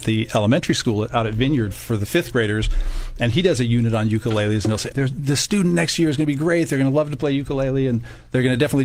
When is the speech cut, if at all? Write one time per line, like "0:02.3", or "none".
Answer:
0:04.9